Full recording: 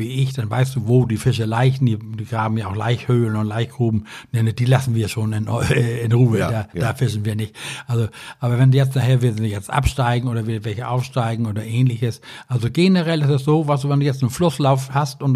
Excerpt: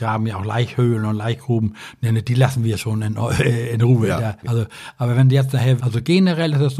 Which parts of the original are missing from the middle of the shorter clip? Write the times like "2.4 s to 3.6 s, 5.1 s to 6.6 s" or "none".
6.7 s to 7.9 s, 9.2 s to 12.5 s